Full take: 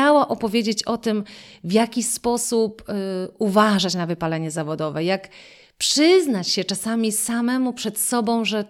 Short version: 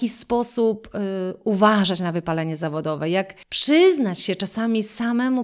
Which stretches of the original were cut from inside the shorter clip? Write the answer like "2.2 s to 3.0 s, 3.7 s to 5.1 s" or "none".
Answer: 5.4 s to 5.7 s